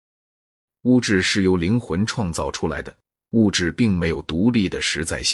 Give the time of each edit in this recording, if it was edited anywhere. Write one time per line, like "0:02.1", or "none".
none